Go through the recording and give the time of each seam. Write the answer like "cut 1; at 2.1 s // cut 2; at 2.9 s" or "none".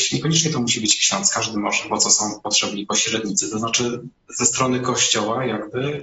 cut 1; at 1.9 s